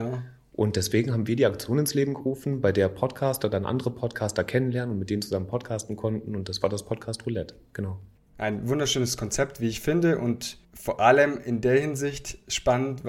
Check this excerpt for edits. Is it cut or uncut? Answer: uncut